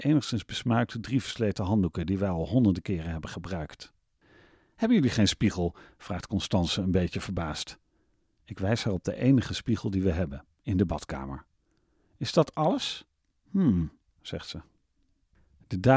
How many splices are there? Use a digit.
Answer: 1